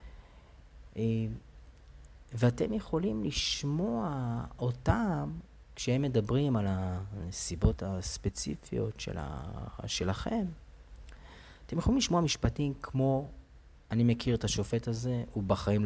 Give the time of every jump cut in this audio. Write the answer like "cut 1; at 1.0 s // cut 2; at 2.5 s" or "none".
none